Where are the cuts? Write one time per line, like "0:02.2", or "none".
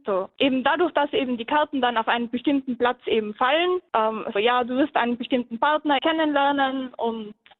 0:04.4
0:06.0